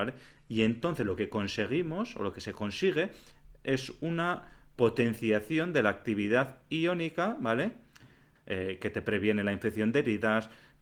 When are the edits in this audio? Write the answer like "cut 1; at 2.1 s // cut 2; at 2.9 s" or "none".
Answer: cut 1; at 8.4 s